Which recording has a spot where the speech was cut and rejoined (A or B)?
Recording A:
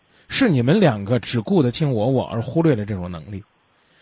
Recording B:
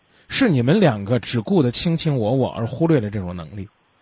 A